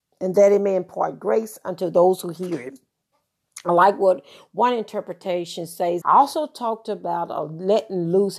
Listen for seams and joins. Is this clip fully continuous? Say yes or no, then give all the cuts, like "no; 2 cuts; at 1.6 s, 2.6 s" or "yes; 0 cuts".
no; 1 cut; at 6.0 s